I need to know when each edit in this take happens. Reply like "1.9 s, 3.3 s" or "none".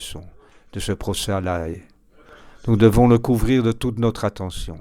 none